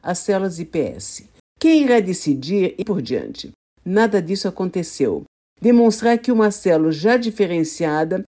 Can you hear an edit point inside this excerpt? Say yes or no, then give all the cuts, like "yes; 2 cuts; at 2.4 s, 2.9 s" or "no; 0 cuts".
yes; 3 cuts; at 1.4 s, 2.8 s, 5.5 s